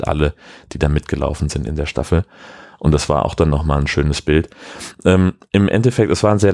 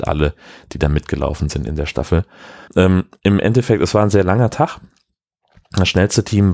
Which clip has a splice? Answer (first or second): second